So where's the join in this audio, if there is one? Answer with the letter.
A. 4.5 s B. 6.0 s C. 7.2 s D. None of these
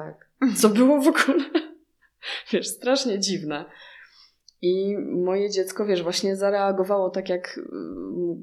D